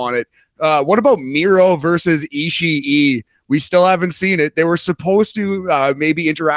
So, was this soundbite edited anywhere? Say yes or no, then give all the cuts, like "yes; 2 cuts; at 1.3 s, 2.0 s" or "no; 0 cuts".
no; 0 cuts